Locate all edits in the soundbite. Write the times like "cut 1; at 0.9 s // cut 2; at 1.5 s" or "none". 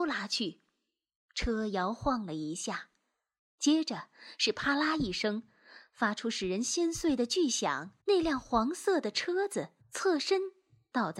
cut 1; at 8.0 s // cut 2; at 9.8 s